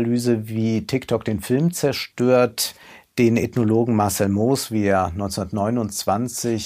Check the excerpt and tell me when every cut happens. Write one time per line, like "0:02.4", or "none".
none